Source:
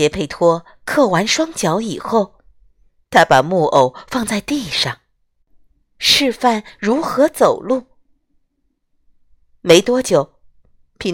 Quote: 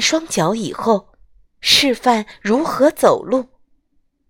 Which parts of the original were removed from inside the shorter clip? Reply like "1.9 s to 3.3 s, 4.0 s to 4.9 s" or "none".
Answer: 2.7 s to 5.8 s